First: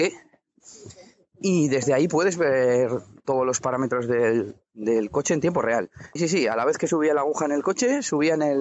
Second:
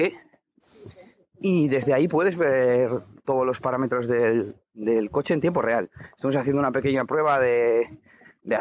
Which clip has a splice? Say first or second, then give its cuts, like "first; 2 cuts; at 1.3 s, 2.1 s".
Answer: first; 1 cut; at 6.2 s